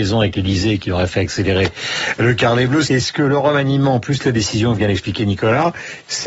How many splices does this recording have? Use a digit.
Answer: 1